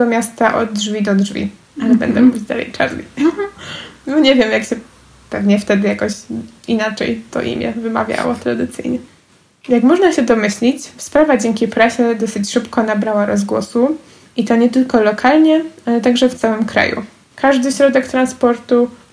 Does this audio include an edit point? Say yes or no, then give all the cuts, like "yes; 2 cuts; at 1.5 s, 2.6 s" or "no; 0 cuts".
yes; 2 cuts; at 1.7 s, 17.3 s